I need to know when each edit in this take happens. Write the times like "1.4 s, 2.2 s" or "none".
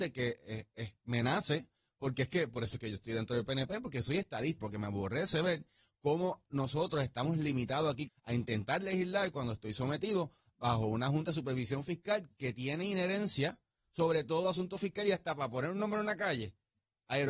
4.6 s, 8.1 s